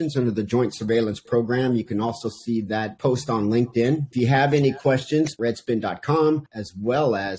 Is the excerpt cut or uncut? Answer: cut